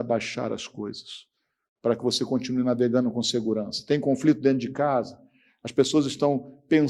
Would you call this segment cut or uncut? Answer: uncut